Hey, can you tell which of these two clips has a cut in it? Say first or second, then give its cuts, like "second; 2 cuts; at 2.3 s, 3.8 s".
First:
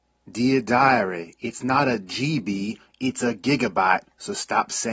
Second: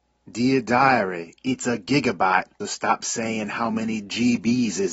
second; 2 cuts; at 1.4 s, 2.6 s